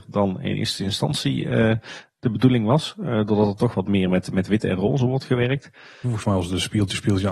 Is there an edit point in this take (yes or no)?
yes